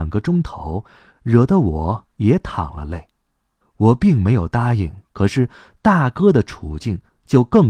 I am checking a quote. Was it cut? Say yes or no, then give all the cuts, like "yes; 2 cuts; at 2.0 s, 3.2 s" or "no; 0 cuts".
yes; 2 cuts; at 3.6 s, 5.1 s